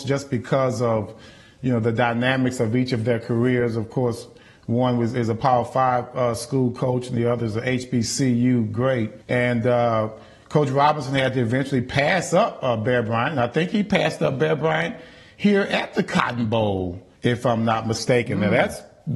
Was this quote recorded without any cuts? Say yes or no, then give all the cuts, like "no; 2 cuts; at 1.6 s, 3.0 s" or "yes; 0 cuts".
no; 2 cuts; at 9.2 s, 17.2 s